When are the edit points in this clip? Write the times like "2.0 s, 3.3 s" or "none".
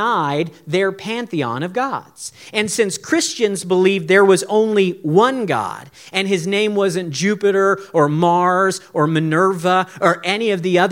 none